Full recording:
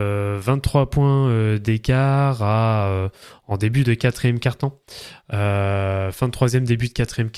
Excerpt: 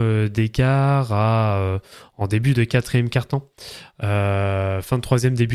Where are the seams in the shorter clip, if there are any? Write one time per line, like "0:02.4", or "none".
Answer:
none